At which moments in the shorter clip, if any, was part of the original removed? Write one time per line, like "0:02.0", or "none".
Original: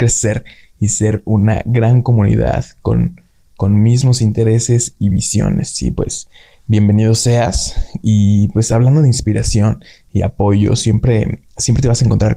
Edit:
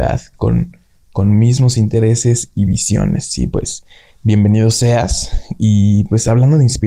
none